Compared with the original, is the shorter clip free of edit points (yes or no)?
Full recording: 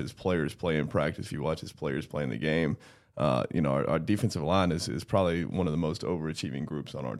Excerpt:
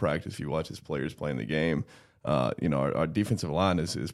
yes